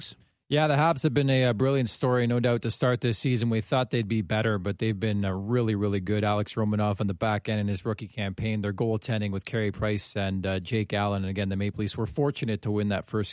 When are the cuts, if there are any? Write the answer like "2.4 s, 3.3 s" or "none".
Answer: none